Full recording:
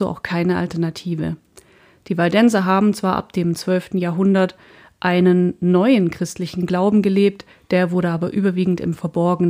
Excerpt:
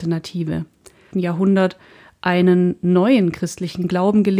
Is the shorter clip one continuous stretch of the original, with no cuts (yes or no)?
no